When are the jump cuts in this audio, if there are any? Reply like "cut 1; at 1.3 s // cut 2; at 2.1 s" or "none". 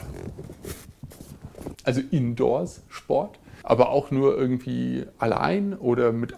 cut 1; at 1.7 s // cut 2; at 3.6 s